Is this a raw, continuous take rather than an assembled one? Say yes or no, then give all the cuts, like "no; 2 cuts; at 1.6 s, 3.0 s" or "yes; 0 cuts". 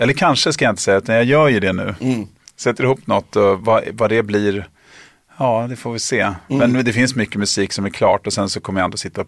yes; 0 cuts